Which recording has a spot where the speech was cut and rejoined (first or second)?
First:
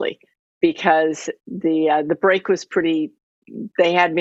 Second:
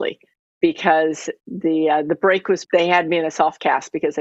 second